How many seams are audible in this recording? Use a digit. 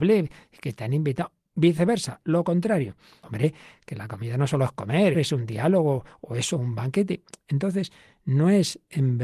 2